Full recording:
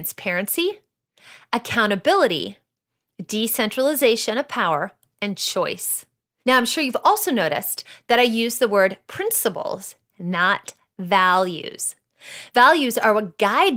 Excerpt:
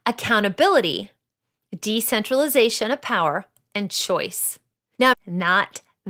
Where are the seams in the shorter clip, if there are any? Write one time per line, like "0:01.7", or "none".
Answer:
0:05.1